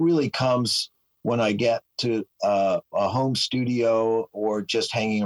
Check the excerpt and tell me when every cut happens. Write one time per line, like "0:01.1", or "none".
0:02.9
0:04.3